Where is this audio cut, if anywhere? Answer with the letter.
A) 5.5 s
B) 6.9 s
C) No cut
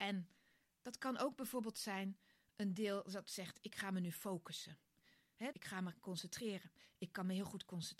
A